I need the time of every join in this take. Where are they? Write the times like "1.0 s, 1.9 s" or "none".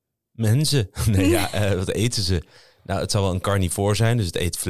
none